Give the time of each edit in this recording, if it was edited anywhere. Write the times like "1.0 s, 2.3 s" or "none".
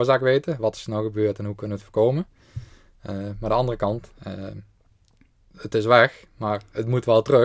none